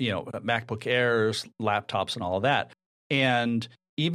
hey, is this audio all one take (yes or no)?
yes